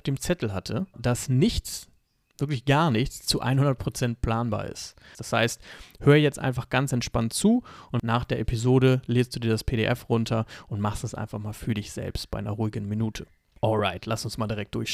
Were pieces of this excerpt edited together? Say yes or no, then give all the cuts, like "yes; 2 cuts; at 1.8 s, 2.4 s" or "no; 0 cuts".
yes; 2 cuts; at 0.9 s, 5.1 s